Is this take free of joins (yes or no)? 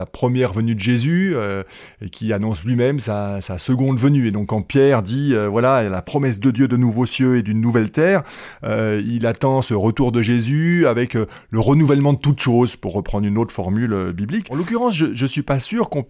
yes